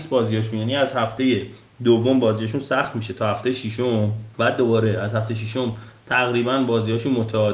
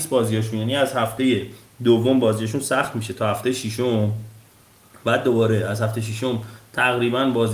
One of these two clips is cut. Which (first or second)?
first